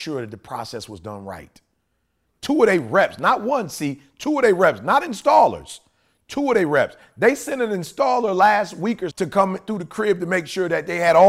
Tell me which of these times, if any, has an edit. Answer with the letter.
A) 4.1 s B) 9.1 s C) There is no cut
B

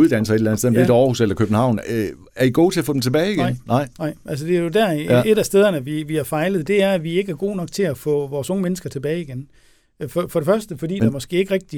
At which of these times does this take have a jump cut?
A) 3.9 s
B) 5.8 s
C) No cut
C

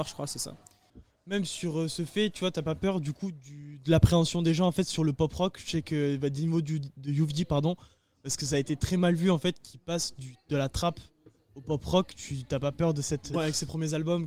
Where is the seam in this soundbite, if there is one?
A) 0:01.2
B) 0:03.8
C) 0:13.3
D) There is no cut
C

